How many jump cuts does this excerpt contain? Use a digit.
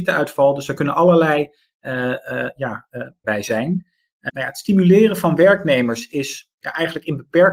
2